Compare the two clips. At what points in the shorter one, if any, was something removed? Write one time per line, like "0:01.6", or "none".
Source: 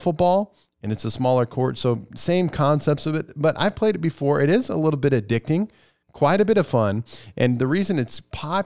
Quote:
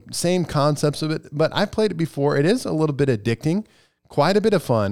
none